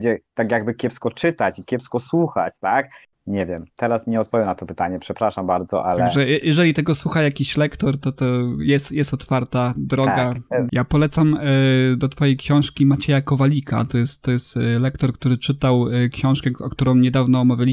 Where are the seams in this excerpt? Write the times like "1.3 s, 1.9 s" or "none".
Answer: 3.1 s, 6.4 s, 10.7 s

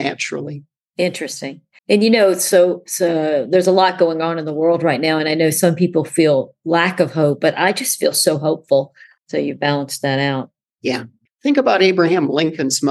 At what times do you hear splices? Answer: 1.8 s, 9.2 s, 11.3 s

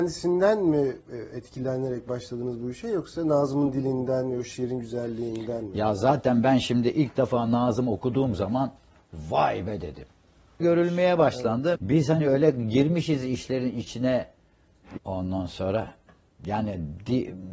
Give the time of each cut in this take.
10.6 s, 11.8 s, 15.0 s

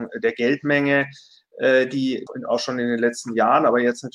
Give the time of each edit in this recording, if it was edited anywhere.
2.3 s

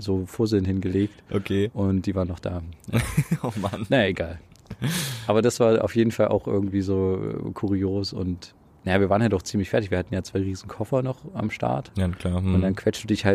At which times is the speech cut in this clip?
none

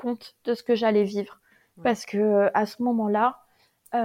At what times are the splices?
none

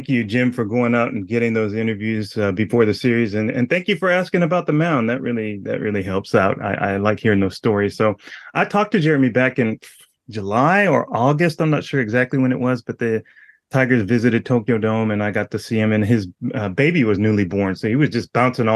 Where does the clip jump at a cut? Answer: none

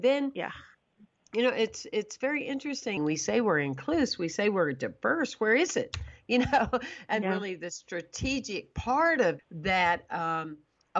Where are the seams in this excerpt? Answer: 3.0 s, 7.2 s, 9.4 s

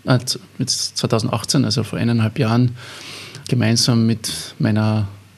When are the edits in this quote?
3.4 s

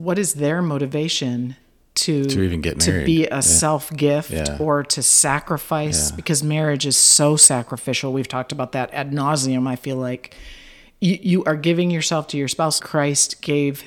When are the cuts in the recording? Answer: 12.8 s

